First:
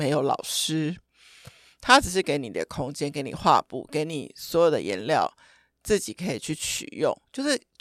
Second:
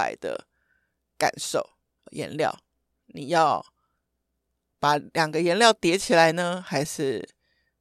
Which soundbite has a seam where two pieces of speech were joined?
second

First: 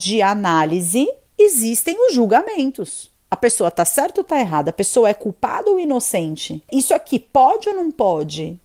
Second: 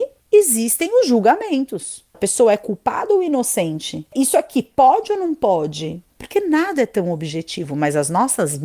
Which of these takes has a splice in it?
second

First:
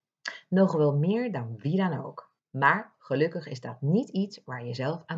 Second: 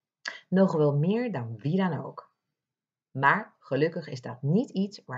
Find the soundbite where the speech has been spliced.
first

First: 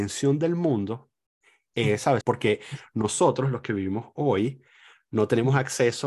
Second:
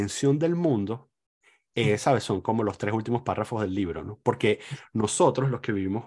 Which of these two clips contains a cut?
first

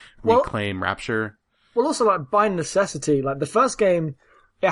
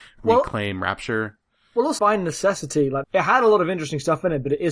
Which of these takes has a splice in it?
second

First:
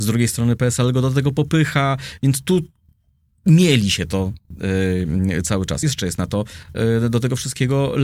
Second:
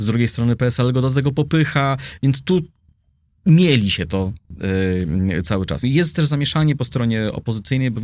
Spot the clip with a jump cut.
second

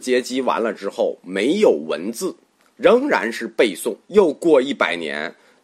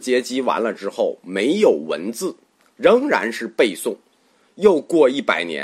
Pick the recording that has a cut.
first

